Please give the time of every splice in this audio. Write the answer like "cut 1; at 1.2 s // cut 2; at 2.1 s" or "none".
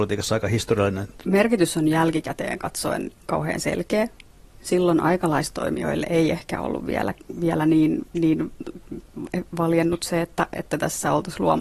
cut 1; at 1.2 s